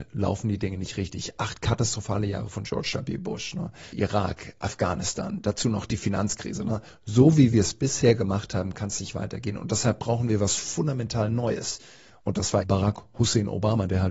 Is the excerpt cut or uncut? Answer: cut